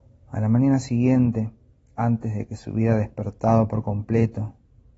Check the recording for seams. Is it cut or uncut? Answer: uncut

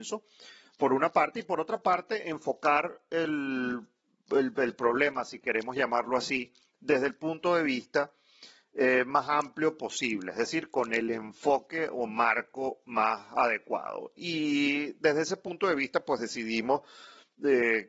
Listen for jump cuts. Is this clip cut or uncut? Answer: uncut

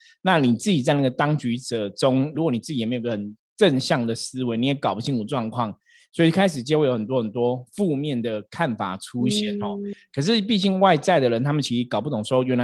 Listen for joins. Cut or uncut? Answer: cut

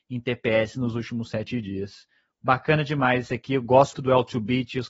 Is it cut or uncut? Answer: cut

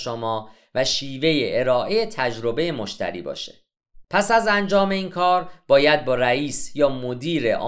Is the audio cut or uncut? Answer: cut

